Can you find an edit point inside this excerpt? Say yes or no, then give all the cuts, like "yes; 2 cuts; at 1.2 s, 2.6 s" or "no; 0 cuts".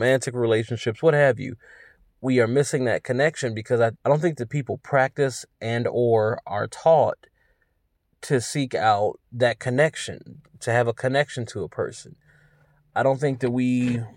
yes; 2 cuts; at 4.0 s, 9.2 s